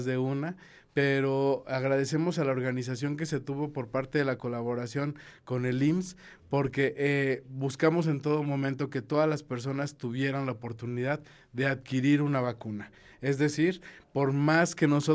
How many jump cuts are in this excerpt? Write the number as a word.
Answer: zero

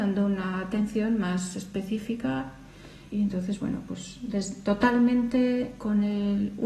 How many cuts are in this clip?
one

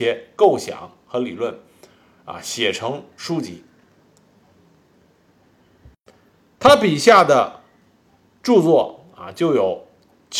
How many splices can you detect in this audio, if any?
zero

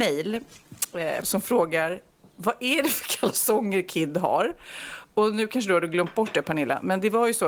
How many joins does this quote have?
one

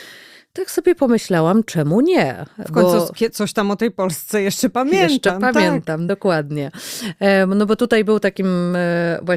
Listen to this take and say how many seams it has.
zero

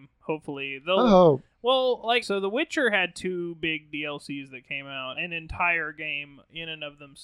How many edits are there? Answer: two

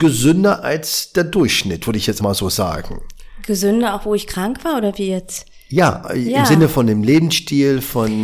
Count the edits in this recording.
one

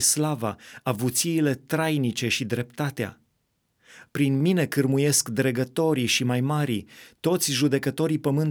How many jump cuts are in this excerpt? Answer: one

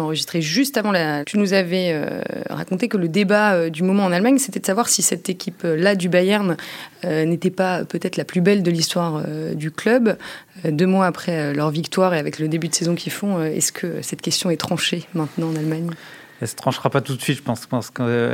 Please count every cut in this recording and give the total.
two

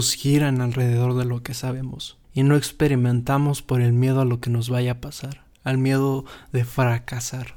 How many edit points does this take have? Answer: one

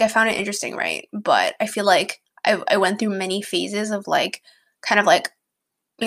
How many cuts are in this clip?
zero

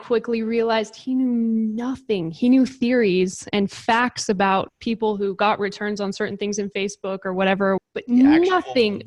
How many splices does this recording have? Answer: two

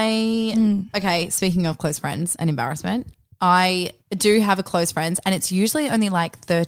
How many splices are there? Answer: one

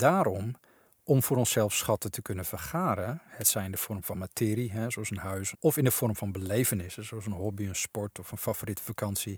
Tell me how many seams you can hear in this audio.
one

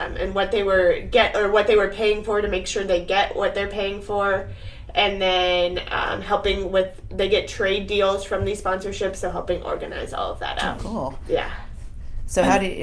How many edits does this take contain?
one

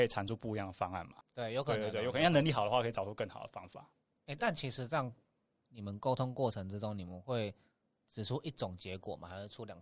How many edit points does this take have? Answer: one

